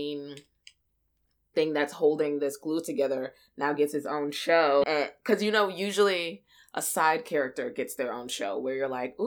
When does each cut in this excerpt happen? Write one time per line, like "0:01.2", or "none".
0:04.8